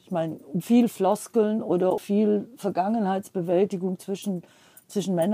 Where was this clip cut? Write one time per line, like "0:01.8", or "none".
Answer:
0:02.0

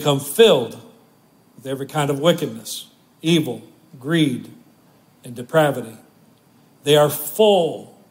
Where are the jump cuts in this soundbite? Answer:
none

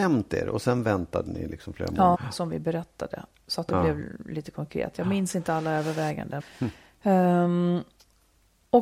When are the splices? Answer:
0:02.1
0:06.4

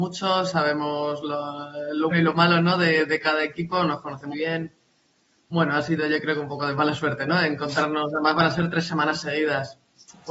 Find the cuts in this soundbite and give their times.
0:02.1
0:04.3

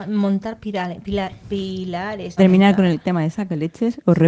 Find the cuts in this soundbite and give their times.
0:02.4

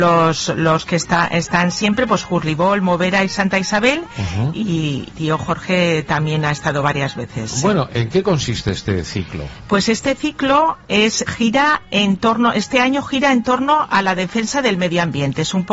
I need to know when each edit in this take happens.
0:05.1
0:11.3

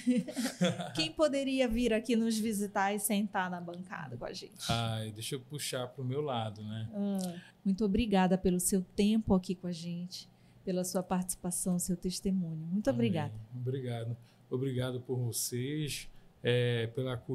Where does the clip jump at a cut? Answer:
0:07.5

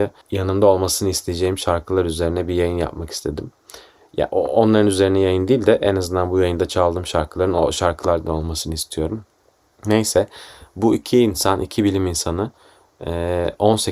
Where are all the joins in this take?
none

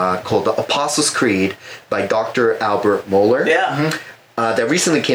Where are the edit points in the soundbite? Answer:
none

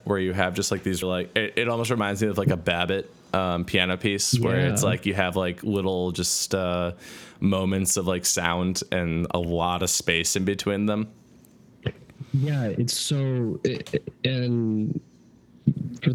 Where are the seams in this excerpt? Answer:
0:01.0

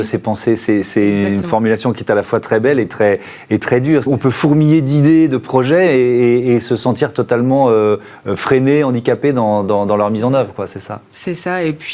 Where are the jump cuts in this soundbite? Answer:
0:04.1

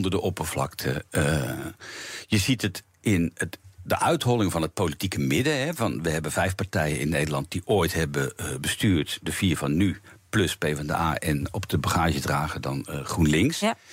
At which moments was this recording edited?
none

